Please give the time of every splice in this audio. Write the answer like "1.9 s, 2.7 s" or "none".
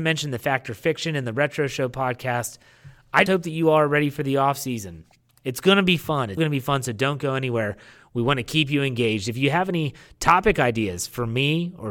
3.3 s, 6.4 s